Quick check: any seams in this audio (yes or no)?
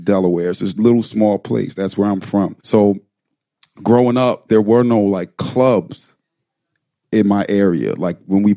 yes